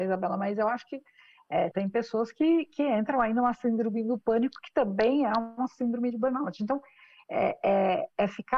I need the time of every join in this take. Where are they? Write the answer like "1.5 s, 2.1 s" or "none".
1.7 s